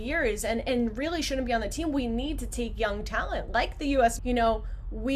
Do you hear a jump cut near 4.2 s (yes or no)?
yes